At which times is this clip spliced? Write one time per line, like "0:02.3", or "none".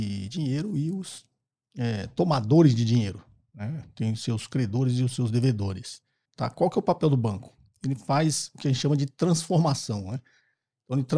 0:06.2